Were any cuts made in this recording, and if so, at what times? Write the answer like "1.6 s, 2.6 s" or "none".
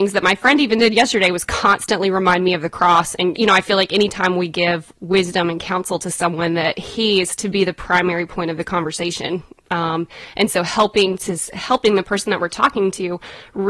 3.4 s

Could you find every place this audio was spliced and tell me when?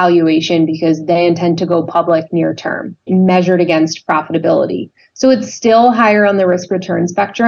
3.1 s

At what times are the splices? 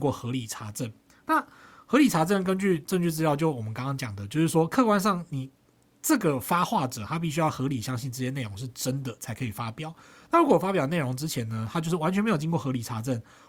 none

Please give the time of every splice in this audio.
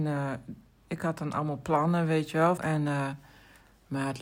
2.6 s

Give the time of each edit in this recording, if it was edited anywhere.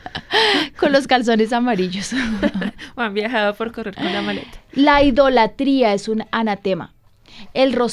none

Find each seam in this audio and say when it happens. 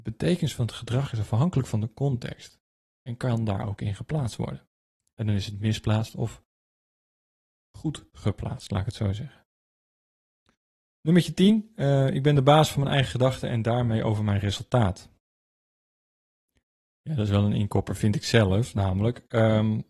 none

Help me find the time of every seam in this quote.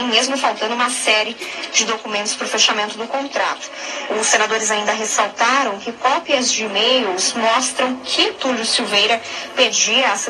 4.1 s

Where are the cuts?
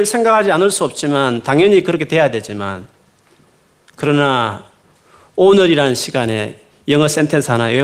none

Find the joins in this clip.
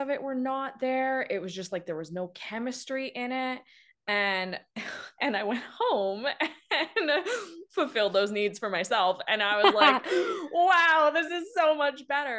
none

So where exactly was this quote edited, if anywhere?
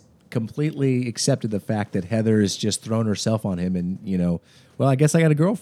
none

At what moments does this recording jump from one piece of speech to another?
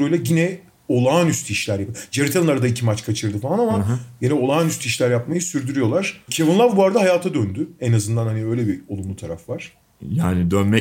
none

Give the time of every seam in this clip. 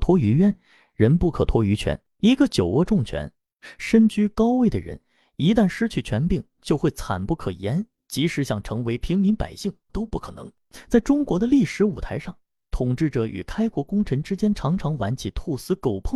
9.9 s

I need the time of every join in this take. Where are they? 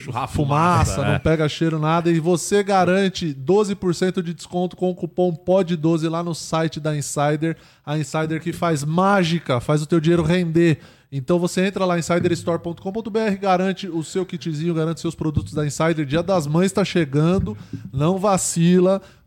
none

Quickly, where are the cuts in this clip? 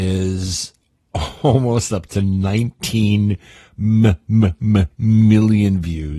none

